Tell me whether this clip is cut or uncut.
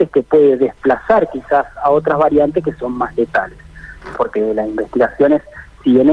cut